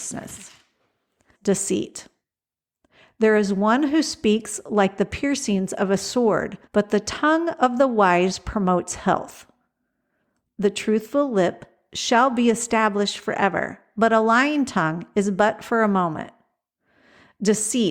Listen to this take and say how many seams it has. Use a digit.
2